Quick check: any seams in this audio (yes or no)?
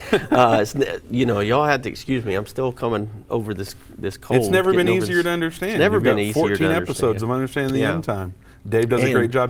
no